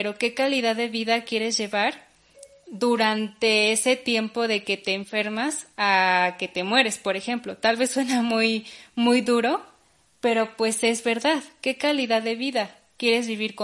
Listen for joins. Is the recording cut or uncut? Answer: uncut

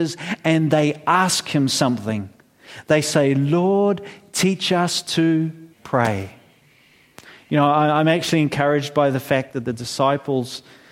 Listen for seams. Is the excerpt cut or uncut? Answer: cut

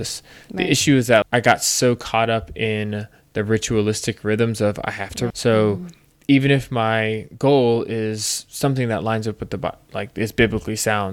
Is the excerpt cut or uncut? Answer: cut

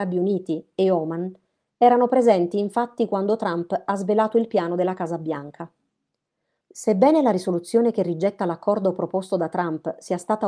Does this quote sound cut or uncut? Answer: cut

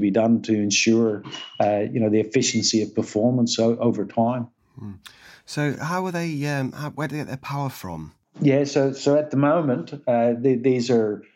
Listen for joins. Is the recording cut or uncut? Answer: uncut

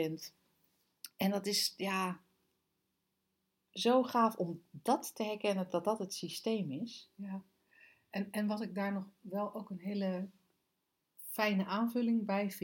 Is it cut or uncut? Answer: uncut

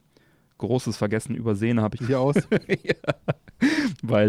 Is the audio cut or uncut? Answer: cut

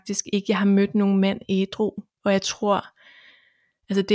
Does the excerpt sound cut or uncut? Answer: uncut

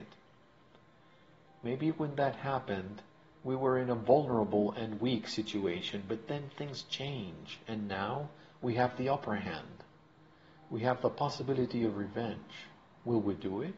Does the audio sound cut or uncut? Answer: uncut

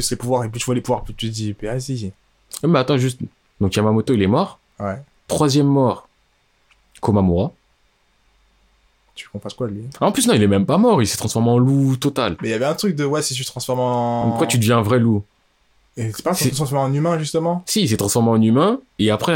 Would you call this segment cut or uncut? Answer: uncut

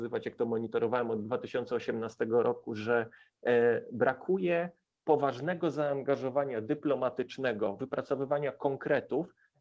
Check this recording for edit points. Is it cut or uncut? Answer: uncut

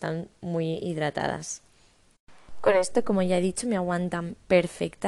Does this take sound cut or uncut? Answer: uncut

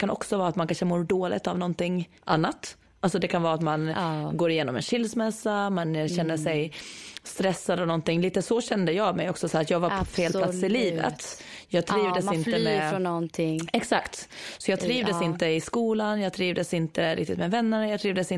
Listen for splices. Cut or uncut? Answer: cut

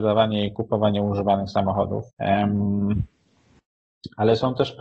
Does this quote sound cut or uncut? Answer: cut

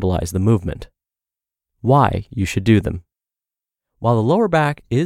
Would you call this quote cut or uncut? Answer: cut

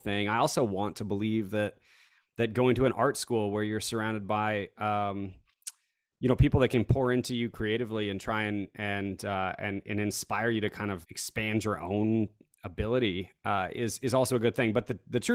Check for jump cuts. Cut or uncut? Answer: cut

